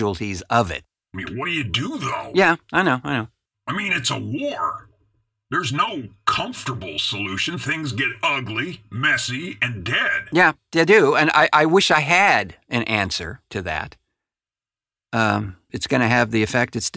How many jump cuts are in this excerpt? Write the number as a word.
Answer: one